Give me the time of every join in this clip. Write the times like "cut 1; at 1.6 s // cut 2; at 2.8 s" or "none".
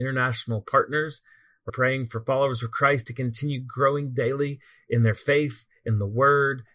cut 1; at 1.7 s